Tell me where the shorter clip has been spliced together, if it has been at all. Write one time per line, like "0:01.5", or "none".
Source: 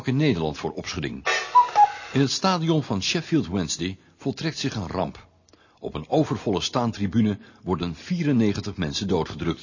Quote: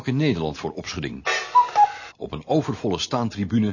0:02.1